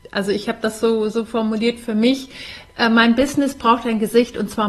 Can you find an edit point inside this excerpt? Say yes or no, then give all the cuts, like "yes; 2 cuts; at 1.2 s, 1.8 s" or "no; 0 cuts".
no; 0 cuts